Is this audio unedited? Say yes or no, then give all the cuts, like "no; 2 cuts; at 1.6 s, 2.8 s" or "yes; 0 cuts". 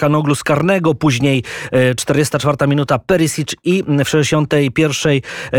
yes; 0 cuts